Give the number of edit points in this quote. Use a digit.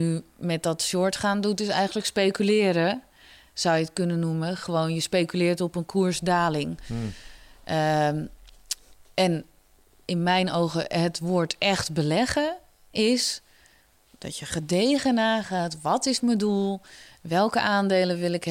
0